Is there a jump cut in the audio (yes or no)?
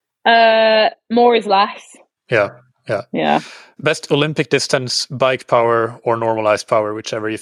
yes